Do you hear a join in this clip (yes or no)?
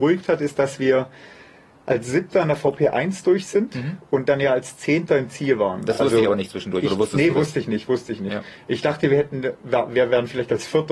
no